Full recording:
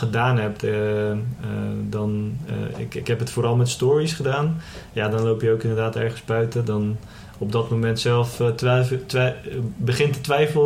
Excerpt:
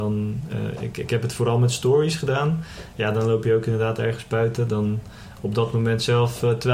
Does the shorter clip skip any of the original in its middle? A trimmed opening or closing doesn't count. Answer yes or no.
no